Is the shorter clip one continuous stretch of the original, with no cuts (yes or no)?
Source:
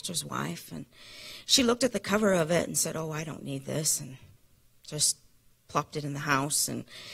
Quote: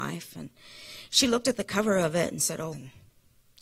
no